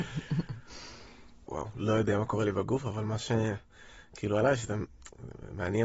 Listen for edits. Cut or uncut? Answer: cut